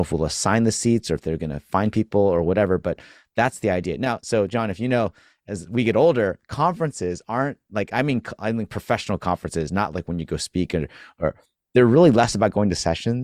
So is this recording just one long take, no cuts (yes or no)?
yes